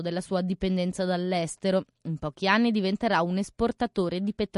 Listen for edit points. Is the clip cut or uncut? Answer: uncut